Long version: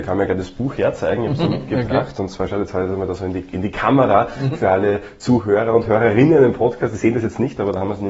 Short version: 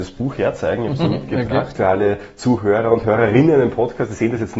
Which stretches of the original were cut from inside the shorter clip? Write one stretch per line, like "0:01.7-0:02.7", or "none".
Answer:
0:02.1-0:04.6